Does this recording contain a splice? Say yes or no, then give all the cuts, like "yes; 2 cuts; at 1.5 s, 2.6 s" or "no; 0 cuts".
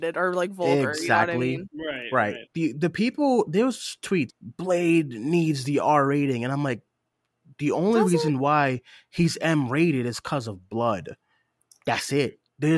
yes; 1 cut; at 4.3 s